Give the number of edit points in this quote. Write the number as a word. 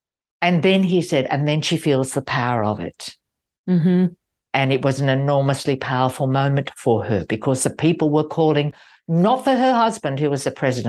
zero